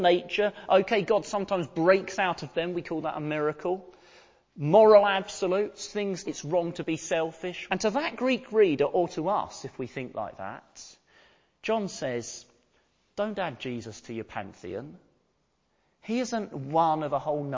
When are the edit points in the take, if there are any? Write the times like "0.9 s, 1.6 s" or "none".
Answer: 6.2 s, 7.7 s